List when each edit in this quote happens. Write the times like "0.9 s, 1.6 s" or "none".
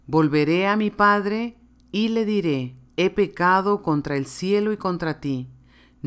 2.9 s